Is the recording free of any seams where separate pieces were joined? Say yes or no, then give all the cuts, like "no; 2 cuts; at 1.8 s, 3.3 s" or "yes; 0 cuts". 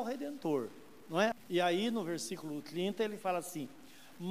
no; 1 cut; at 1.3 s